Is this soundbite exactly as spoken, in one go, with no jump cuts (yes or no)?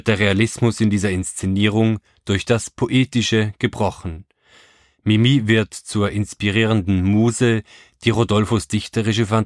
yes